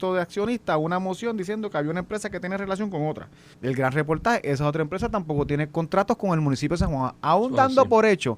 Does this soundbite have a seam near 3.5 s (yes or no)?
yes